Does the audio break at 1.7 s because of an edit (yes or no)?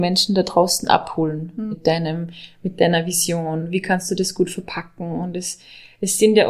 yes